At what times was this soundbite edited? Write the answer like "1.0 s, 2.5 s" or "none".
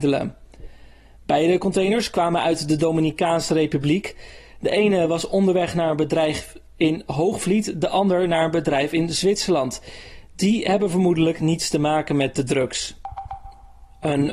none